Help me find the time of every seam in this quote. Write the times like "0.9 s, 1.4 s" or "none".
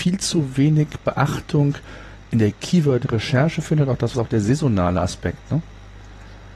4.1 s